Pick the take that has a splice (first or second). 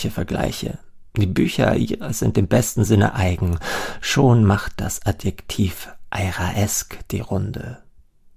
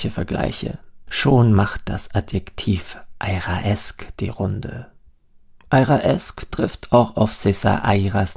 second